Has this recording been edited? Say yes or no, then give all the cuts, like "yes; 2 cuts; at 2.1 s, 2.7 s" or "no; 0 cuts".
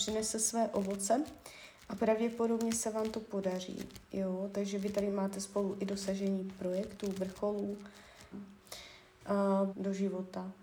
yes; 2 cuts; at 8.3 s, 9.7 s